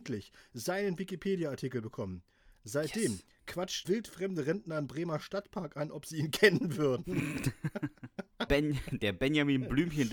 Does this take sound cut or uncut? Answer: cut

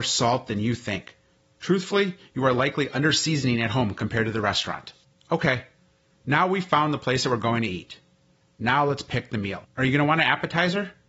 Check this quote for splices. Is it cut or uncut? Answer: cut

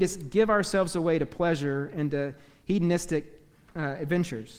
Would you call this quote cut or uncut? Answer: uncut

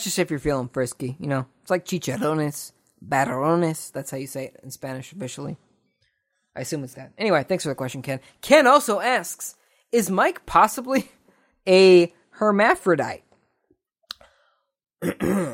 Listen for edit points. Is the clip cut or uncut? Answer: cut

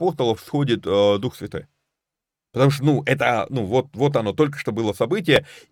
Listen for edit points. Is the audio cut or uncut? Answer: uncut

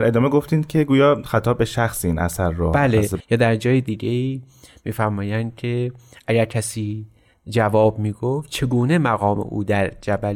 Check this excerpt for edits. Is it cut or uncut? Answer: cut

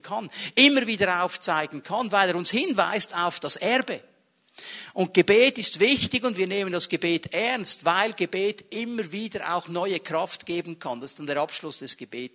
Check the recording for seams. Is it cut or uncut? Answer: uncut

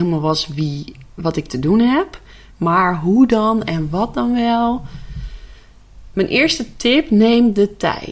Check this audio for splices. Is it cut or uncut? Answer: cut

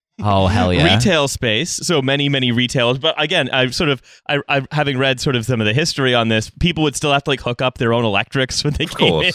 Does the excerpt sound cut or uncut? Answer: uncut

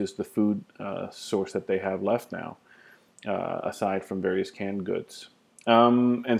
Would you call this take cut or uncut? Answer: uncut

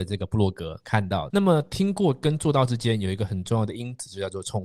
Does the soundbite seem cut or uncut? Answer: cut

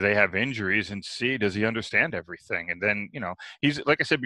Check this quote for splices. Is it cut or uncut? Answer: uncut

